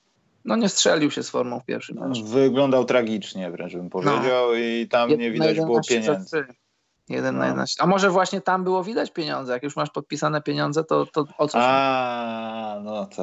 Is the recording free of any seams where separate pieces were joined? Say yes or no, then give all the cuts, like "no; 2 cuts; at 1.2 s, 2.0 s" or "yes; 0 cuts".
yes; 0 cuts